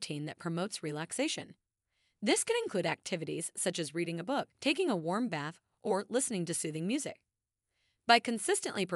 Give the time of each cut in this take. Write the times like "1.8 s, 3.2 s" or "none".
4.5 s